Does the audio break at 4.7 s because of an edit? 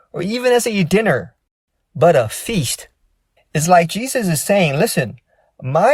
no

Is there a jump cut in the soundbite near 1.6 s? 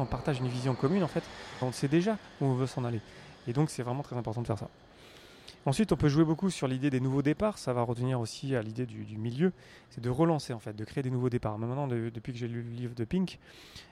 yes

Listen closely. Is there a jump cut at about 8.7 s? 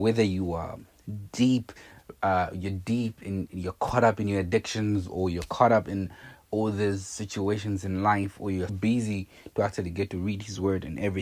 yes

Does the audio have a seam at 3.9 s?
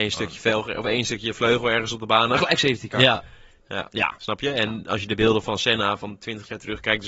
yes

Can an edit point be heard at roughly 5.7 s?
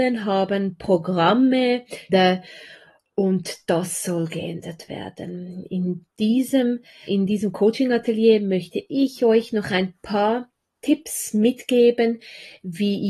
no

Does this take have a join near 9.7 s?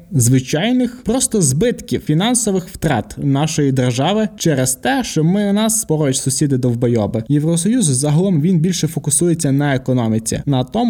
no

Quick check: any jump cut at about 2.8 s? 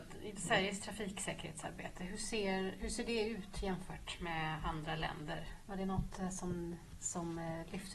yes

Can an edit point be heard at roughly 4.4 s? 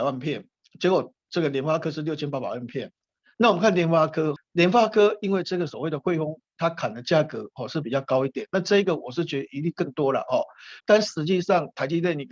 yes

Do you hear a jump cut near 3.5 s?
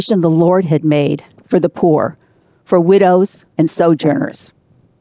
yes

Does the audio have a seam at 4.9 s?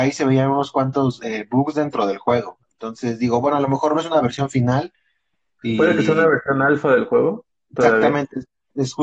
no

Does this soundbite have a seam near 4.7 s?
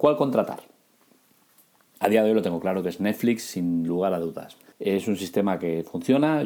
yes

